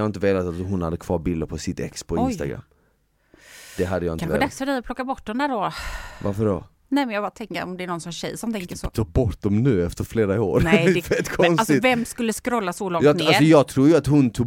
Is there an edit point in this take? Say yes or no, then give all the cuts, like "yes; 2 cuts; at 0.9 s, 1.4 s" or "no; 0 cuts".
no; 0 cuts